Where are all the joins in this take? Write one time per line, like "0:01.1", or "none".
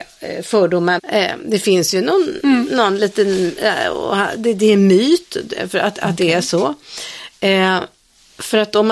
0:01.0